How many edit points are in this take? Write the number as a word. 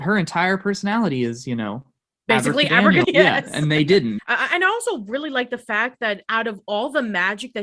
two